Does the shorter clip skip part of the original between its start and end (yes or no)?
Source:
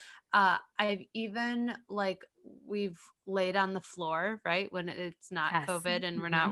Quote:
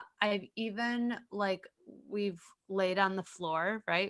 no